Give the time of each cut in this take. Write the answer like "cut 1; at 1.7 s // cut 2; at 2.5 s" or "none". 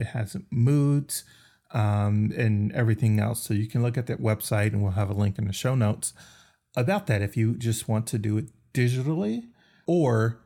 none